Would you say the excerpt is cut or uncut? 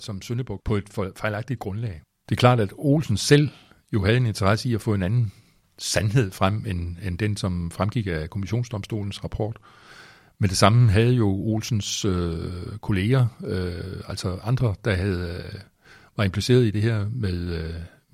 uncut